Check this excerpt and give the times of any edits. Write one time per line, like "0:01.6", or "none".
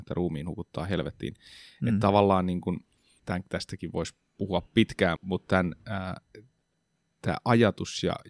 0:03.2
0:05.2